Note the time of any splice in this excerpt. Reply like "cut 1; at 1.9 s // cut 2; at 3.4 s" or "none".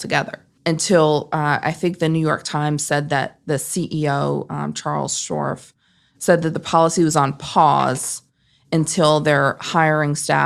none